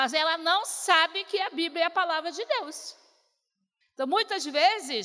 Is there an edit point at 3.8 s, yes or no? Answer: yes